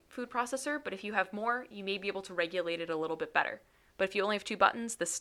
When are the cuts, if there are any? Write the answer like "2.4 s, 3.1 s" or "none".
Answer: none